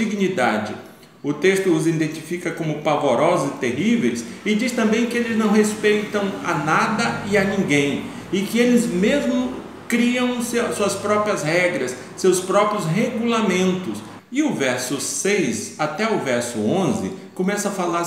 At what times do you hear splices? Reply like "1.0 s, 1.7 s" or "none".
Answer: 14.2 s